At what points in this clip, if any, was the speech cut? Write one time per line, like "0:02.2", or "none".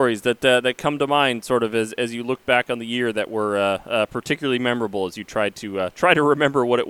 none